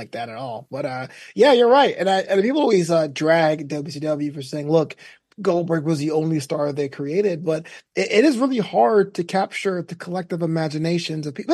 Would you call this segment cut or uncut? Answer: uncut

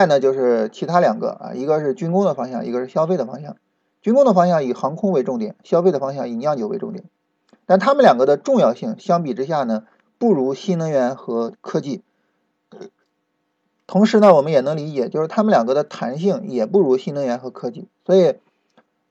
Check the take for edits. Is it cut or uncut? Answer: uncut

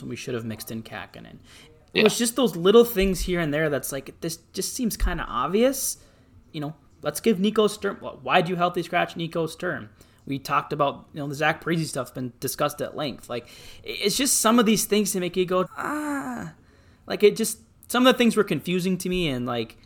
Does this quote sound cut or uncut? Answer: cut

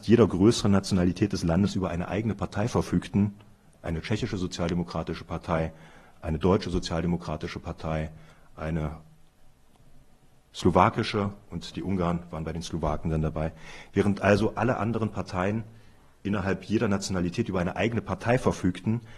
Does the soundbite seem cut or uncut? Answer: uncut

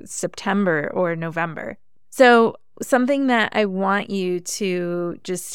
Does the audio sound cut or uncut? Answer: uncut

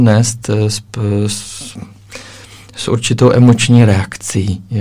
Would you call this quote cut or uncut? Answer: uncut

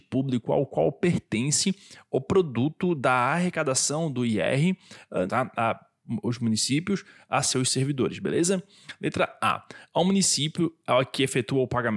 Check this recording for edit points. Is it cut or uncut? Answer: cut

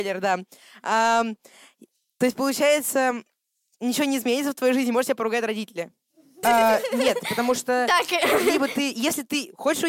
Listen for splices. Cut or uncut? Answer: cut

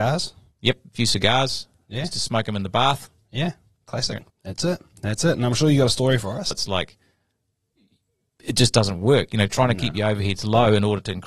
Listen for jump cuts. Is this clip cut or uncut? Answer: cut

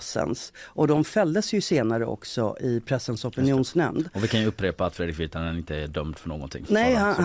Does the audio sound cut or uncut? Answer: uncut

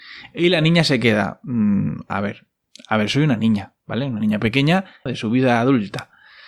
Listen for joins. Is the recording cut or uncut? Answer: cut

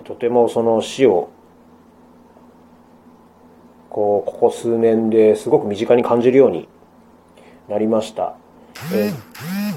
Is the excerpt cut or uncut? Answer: uncut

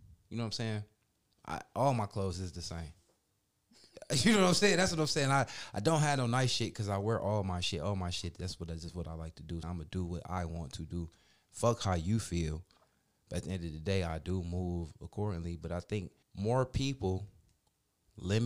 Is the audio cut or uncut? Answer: cut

